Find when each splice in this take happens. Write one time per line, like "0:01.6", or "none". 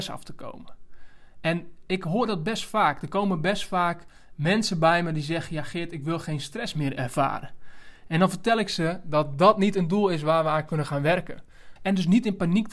0:11.8